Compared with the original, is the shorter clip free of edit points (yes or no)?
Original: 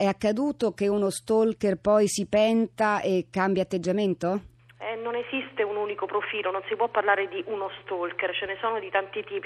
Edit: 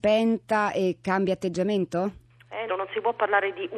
no